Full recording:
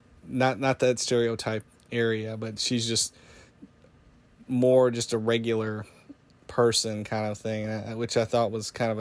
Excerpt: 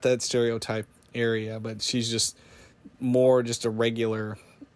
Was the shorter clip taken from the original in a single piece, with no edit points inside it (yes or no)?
no